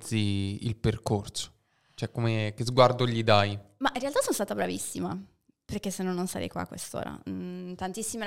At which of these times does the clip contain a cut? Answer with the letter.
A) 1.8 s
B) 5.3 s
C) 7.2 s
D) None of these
D